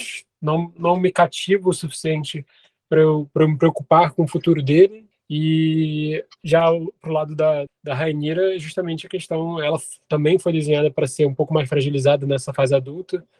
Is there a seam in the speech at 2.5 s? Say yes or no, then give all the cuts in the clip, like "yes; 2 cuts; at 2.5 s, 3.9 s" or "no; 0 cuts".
no; 2 cuts; at 5.1 s, 7.7 s